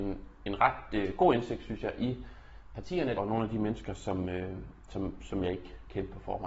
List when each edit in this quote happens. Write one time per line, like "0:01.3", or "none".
0:03.1